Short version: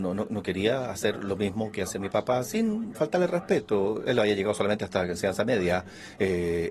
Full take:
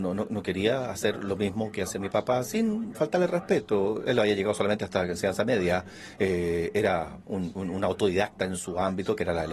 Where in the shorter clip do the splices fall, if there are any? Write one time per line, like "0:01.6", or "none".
none